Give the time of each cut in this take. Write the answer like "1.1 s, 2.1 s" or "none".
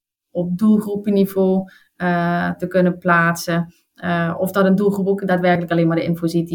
none